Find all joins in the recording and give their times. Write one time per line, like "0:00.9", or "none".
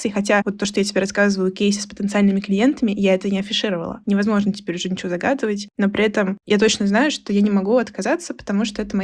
0:04.0